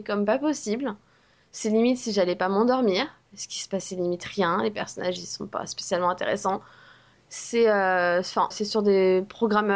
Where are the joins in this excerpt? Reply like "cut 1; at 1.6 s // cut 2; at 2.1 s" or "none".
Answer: cut 1; at 7.1 s // cut 2; at 8.5 s